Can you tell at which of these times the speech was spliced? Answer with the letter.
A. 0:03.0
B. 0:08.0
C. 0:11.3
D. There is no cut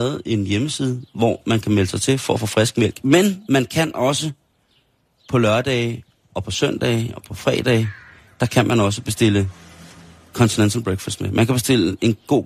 D